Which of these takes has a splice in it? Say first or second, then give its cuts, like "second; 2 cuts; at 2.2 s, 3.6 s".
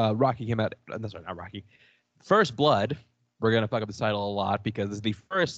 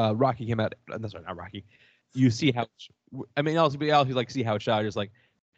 second; 1 cut; at 2.0 s